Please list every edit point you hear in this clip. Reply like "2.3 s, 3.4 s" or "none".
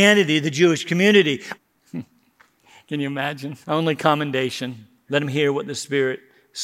1.5 s, 3.6 s, 5.1 s